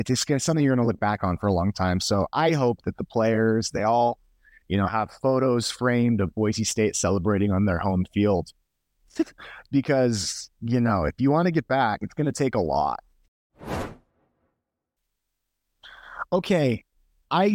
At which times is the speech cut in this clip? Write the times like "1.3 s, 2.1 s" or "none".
3.7 s

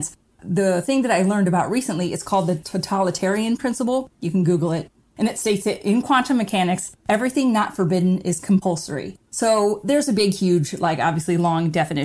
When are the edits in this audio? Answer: none

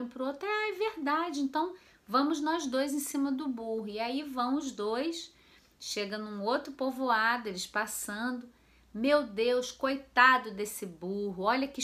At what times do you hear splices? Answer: none

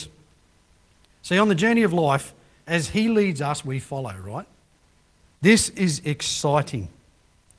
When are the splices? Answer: 5.3 s

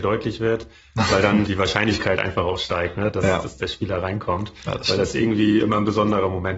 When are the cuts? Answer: 1.5 s

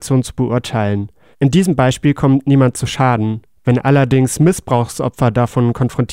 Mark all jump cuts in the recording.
1.3 s

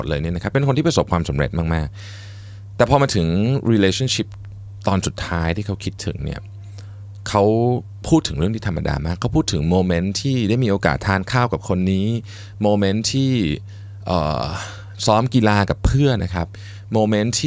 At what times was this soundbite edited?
16.2 s

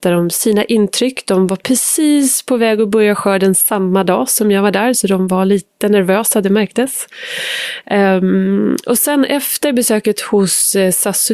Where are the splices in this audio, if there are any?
none

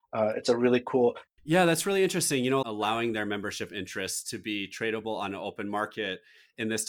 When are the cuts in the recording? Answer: 1.3 s, 2.6 s

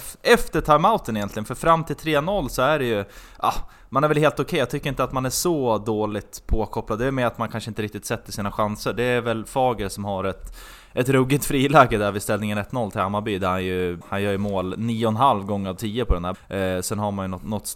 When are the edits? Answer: 14.0 s, 16.3 s

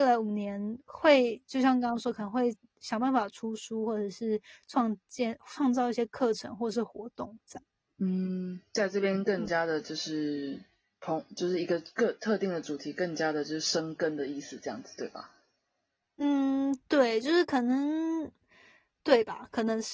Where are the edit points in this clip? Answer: none

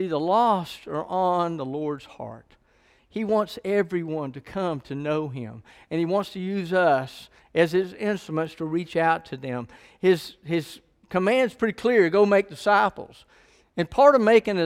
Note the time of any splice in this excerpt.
none

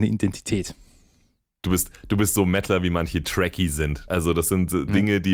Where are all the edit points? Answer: 4.1 s

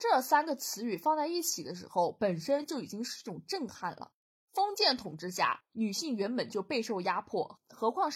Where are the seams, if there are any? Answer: none

